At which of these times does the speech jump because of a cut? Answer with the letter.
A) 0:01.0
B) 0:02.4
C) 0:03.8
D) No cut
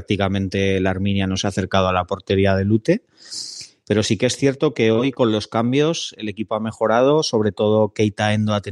C